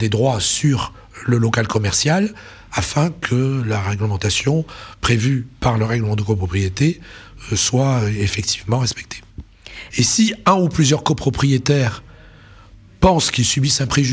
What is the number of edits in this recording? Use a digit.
1